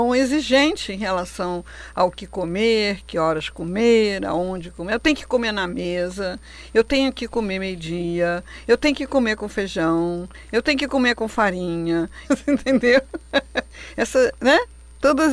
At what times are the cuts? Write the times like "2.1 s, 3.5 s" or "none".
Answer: 12.2 s